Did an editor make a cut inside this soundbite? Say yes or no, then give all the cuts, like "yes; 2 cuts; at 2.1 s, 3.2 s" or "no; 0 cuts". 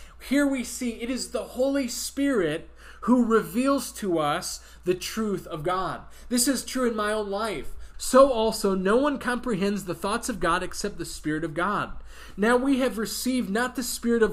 yes; 1 cut; at 7.9 s